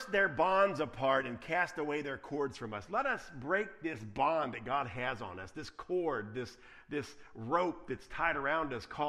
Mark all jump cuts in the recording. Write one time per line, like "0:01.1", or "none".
none